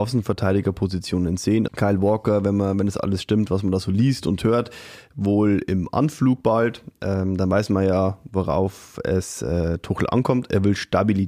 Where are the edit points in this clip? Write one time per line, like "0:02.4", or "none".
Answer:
0:01.7